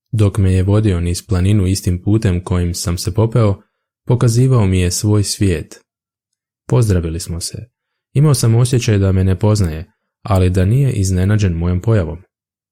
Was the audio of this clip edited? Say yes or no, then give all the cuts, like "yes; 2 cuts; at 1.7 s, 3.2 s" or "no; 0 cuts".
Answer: yes; 1 cut; at 6.6 s